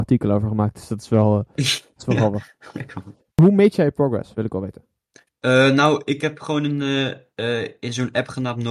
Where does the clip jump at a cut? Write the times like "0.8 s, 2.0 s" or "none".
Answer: none

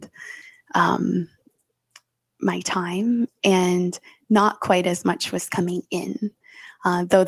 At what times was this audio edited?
none

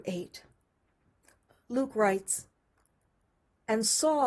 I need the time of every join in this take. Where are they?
none

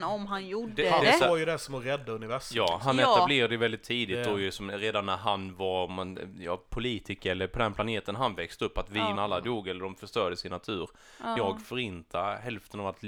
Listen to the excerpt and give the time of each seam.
9.2 s, 11.4 s

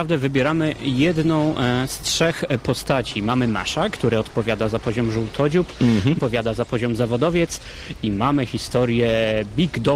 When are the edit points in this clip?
6.2 s

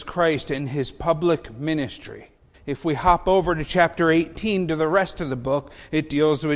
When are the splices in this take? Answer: 2.5 s

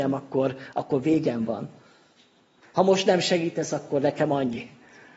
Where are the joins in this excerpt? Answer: 2.6 s

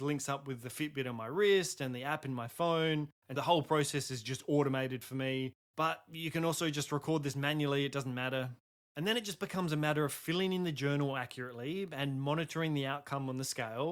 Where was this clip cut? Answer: 3.4 s

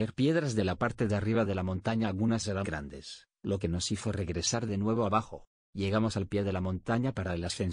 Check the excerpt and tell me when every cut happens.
2.6 s, 5.6 s

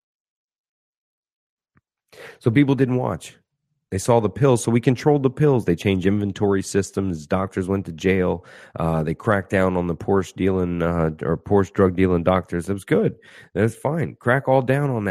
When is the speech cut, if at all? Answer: none

